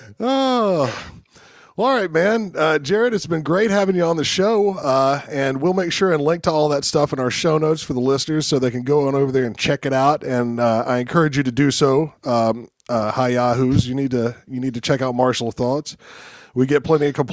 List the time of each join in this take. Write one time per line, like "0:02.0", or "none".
none